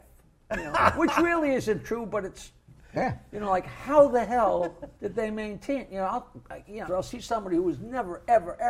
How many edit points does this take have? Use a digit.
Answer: 2